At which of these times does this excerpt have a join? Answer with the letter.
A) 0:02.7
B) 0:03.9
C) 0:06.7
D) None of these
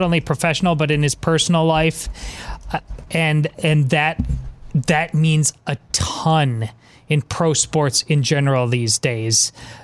D